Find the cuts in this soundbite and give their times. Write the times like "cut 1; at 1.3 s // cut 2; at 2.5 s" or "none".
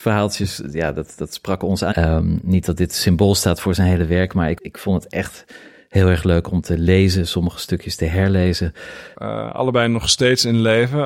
cut 1; at 1.9 s // cut 2; at 4.6 s // cut 3; at 9.1 s